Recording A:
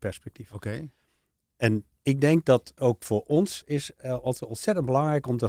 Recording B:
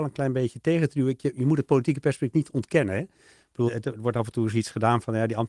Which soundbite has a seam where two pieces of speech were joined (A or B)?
B